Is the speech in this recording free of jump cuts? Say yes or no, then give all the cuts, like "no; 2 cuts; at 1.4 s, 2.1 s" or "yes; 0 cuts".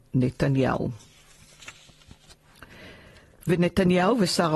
yes; 0 cuts